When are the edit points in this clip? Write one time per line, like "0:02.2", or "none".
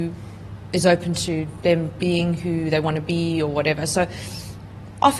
none